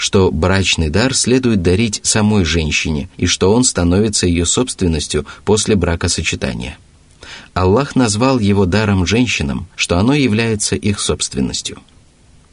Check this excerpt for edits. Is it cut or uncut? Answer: cut